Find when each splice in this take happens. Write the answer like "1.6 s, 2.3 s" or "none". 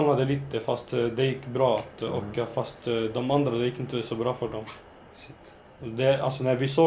none